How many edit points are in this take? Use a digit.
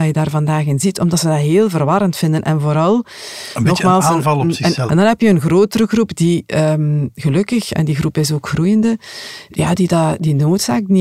1